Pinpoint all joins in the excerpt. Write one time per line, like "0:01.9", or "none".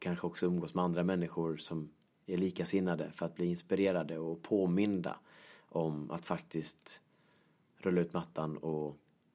none